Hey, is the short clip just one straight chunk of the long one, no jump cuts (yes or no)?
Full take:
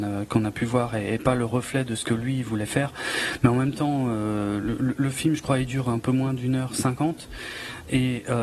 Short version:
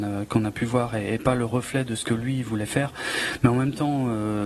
yes